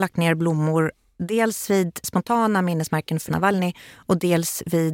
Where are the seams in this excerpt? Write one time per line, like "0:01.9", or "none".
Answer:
0:03.3